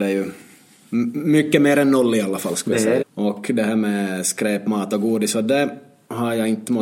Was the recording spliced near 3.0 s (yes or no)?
yes